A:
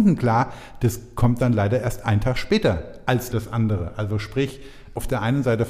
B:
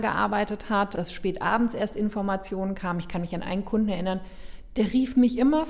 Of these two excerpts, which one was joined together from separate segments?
A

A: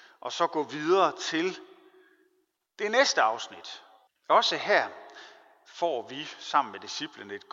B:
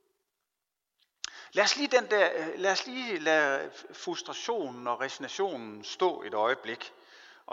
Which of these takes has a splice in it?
A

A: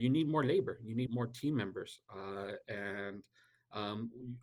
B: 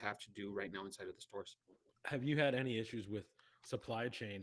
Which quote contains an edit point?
A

